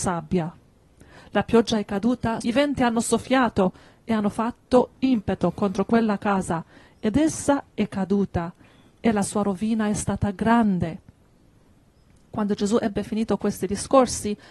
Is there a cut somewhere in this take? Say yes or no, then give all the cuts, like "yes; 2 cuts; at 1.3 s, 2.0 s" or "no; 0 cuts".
yes; 1 cut; at 2.4 s